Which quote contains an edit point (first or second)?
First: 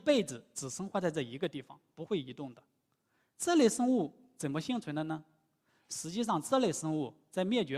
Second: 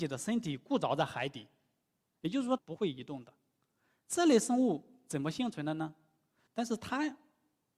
second